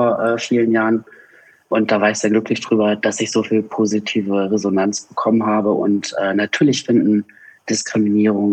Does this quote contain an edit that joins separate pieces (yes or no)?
no